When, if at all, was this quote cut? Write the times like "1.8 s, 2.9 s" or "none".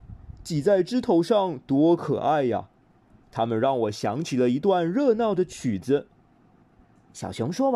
none